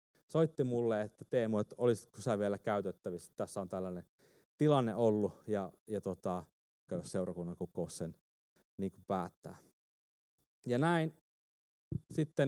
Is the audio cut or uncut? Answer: cut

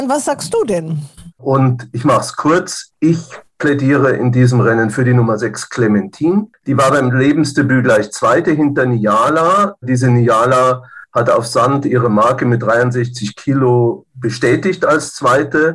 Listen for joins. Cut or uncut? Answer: cut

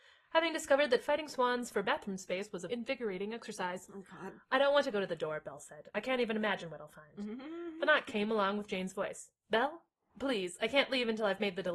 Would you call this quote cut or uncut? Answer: cut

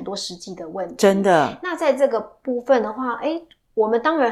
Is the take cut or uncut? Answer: uncut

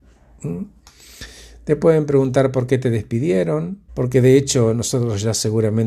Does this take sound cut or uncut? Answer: cut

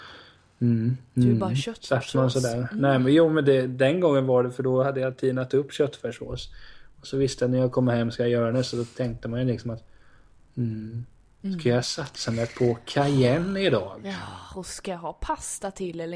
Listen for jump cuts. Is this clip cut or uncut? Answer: uncut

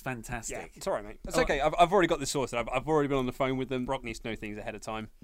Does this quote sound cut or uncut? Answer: cut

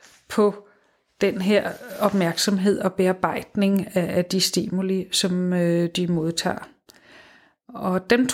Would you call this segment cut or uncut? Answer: uncut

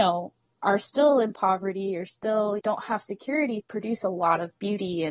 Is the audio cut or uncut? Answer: cut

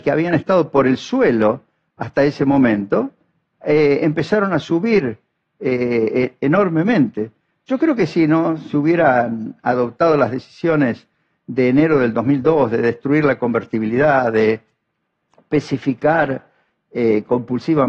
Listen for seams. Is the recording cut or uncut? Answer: uncut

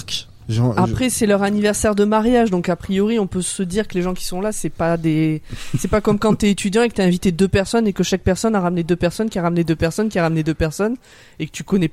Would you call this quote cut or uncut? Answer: uncut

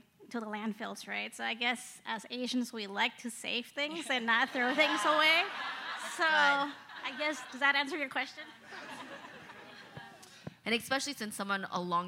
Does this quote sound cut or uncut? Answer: cut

